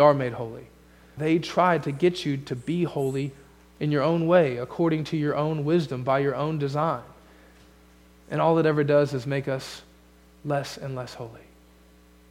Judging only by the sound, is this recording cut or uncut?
cut